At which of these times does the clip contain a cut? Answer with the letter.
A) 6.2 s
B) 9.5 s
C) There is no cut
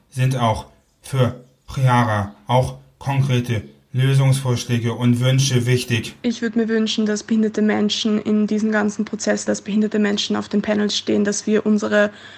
B